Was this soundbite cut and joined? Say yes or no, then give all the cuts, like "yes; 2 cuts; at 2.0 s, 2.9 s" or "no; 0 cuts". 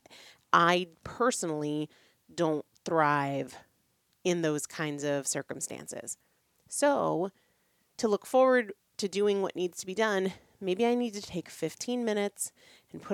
no; 0 cuts